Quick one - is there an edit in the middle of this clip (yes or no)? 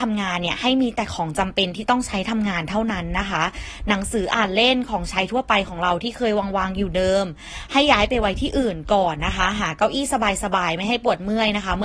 no